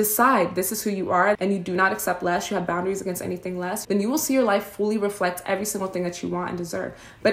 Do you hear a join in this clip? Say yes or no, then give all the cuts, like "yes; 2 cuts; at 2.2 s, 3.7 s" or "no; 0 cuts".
yes; 2 cuts; at 1.3 s, 3.8 s